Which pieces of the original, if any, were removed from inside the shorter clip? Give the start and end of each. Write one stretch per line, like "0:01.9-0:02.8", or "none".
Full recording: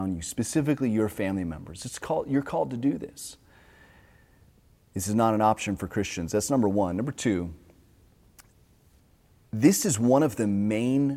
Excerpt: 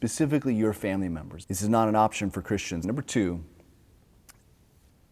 0:01.8-0:04.9
0:06.3-0:06.9